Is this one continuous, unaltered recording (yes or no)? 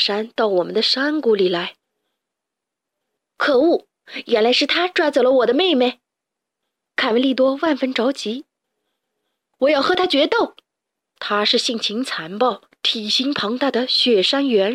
no